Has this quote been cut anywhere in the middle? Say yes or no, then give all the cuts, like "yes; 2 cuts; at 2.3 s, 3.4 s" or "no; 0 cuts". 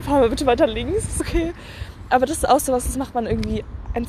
yes; 1 cut; at 1.2 s